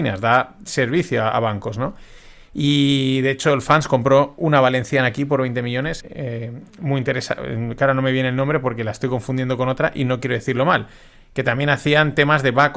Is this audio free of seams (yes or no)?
no